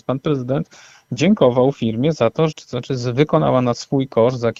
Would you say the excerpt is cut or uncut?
cut